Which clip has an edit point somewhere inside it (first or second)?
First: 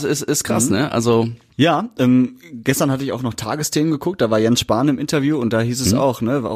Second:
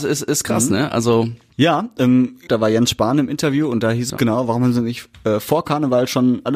second